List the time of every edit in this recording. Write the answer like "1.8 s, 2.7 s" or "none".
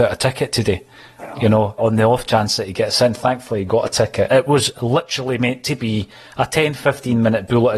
1.8 s, 4.3 s